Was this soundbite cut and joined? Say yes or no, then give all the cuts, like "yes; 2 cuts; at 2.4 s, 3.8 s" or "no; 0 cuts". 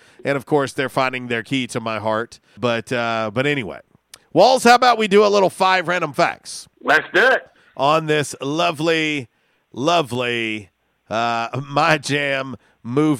yes; 2 cuts; at 2.6 s, 6.7 s